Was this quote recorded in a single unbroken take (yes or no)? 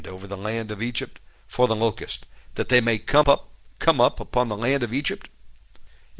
no